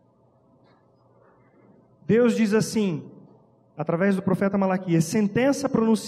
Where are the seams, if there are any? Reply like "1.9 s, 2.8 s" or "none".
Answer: none